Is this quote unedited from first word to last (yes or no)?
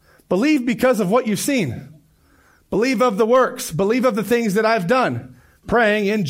yes